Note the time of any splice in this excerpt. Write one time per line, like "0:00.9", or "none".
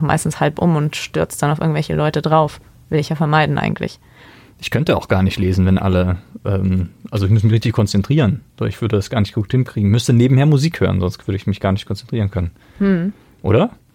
none